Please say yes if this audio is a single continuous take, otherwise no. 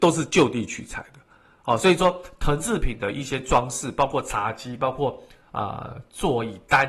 yes